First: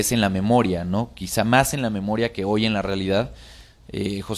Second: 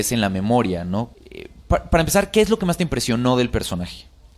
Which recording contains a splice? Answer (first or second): second